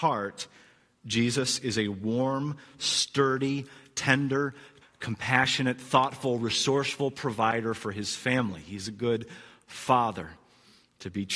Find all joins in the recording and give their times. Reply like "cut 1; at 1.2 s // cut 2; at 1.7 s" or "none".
cut 1; at 4.8 s